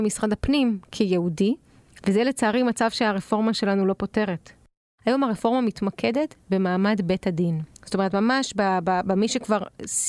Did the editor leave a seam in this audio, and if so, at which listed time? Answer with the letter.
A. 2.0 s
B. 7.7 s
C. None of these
A